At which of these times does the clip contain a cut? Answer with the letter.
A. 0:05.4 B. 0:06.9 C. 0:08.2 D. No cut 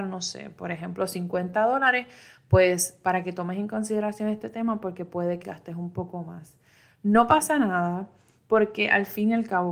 A